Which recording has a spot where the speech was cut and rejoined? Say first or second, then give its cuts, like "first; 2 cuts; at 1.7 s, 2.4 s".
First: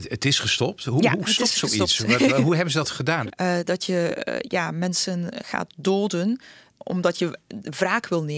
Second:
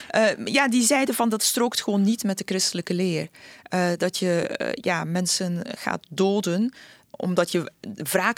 first; 1 cut; at 3.3 s